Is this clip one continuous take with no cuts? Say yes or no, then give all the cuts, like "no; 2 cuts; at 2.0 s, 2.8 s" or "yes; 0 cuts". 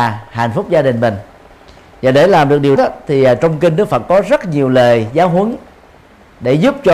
no; 1 cut; at 2.8 s